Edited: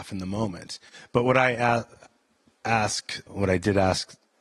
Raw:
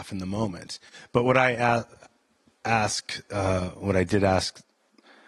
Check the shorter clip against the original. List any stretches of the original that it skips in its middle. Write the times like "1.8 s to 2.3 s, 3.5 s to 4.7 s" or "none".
3.3 s to 3.7 s